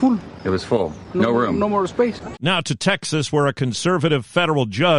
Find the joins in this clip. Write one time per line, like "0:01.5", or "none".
0:02.3